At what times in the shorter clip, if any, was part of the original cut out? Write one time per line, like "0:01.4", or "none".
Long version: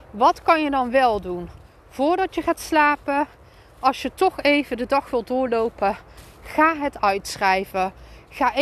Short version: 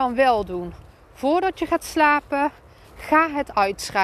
0:02.8